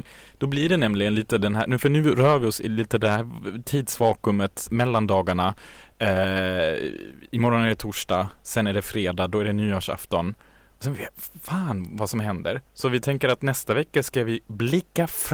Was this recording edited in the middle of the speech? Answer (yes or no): yes